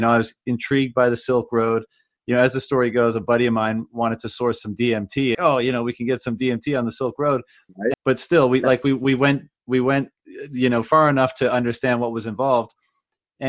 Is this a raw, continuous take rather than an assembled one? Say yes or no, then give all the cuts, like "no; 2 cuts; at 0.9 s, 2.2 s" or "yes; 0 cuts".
no; 2 cuts; at 5.3 s, 7.9 s